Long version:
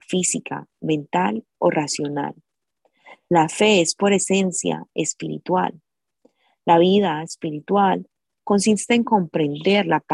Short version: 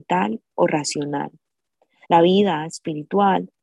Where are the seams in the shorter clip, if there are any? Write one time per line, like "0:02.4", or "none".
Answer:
0:02.0